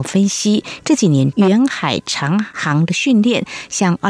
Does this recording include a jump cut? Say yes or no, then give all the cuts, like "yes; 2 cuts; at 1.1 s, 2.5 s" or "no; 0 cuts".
yes; 1 cut; at 1.3 s